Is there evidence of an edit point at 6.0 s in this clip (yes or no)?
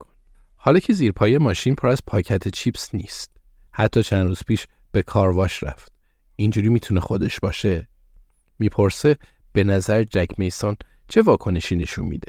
no